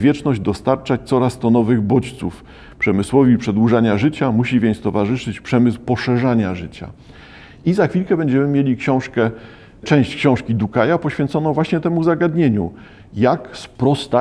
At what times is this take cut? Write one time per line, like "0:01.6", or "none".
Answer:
none